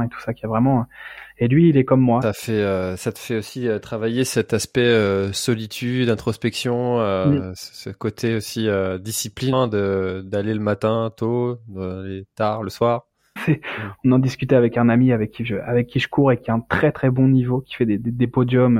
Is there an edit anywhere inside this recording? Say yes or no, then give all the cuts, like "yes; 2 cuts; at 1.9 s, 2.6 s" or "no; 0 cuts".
yes; 3 cuts; at 2.2 s, 9.5 s, 13.4 s